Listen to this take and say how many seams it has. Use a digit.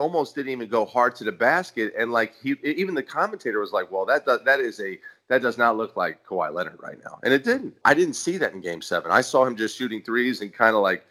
1